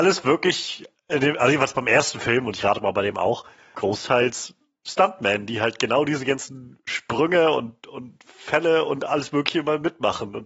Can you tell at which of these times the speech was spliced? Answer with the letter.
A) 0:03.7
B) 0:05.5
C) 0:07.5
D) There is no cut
A